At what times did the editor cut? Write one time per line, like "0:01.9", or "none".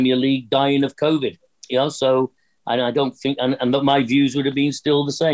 none